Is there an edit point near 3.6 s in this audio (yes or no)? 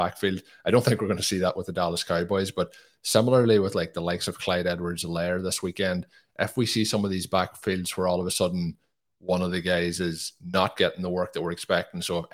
no